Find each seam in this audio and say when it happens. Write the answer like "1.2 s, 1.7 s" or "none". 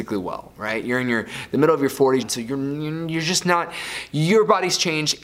2.2 s